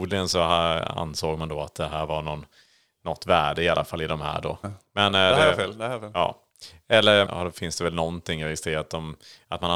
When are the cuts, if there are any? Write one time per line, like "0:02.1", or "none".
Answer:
0:04.6
0:07.3